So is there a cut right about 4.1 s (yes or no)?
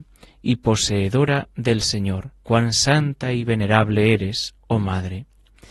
no